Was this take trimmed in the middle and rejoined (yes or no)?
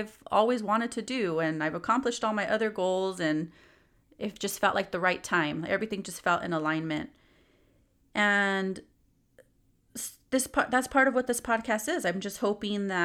no